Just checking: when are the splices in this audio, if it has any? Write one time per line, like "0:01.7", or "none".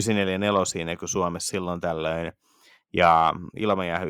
none

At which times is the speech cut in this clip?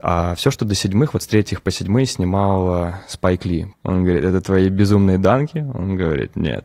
0:03.7

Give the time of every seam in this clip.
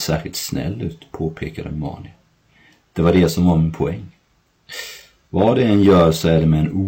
none

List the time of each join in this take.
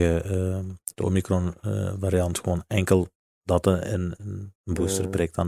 0:04.6

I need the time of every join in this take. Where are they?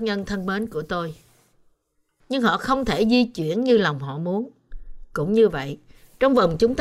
0:02.2

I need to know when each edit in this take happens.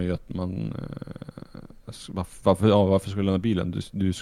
none

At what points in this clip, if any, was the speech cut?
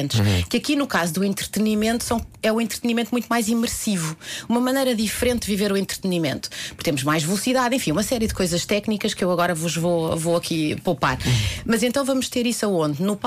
none

